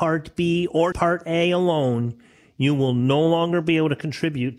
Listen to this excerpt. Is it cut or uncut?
cut